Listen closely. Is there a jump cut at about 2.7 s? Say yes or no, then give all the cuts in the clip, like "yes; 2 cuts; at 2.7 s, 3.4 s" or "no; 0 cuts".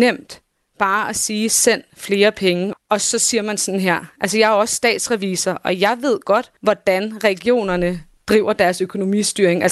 yes; 2 cuts; at 2.7 s, 6.6 s